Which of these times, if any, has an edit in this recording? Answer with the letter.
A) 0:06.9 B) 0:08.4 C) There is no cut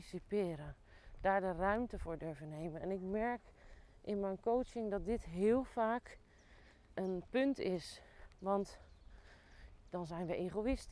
A